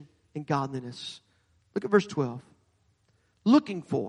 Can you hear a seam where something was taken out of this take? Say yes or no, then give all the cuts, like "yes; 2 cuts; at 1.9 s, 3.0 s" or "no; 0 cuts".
no; 0 cuts